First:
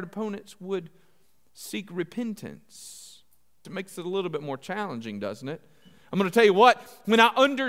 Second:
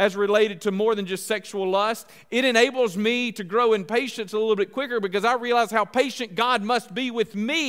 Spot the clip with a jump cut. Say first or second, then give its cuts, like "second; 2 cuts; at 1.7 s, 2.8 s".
first; 1 cut; at 3.6 s